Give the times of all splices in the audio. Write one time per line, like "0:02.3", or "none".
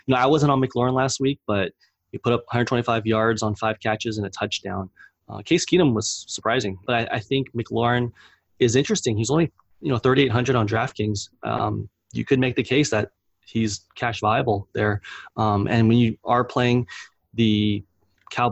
0:06.8